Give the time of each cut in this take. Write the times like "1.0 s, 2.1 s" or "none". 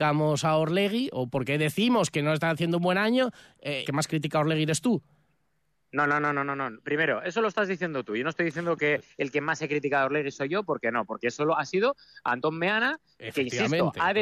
3.8 s